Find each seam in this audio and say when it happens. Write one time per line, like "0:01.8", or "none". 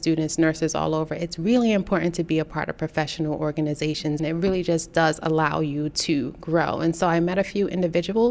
0:04.2